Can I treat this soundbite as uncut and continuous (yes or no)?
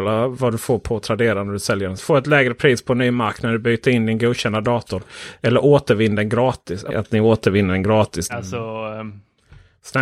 no